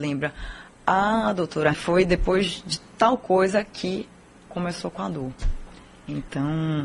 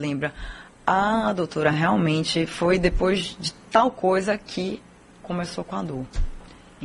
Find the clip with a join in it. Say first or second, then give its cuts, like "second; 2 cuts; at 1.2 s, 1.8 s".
first; 1 cut; at 1.7 s